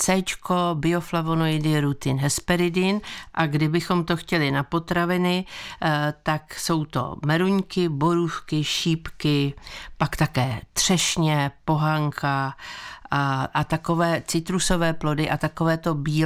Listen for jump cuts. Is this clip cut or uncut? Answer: uncut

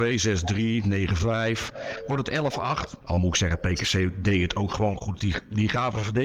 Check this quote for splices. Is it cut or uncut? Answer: cut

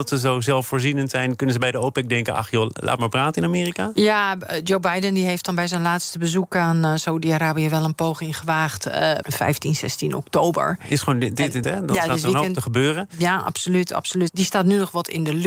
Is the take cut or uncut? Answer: cut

